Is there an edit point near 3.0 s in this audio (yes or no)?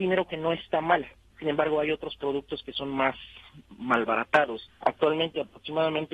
no